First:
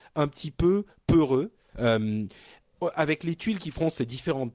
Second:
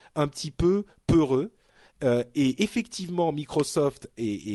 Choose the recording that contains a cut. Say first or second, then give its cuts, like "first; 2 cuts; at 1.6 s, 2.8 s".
first; 1 cut; at 1.7 s